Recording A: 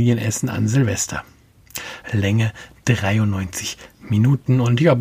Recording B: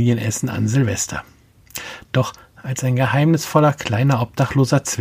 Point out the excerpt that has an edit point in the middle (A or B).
A